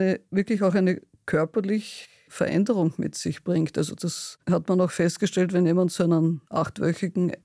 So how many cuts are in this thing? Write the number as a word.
zero